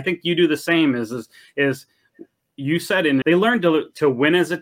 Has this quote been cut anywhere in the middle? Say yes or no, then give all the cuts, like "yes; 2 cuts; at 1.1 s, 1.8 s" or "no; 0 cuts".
yes; 1 cut; at 3.2 s